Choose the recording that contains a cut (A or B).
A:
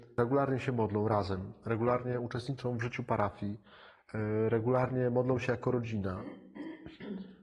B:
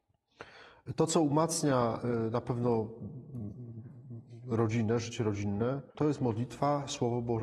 B